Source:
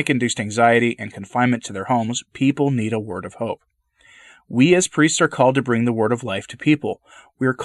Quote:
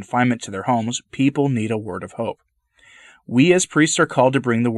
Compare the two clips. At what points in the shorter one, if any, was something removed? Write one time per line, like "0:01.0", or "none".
none